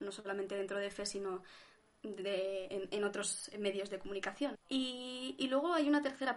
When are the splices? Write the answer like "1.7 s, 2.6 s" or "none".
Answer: 4.5 s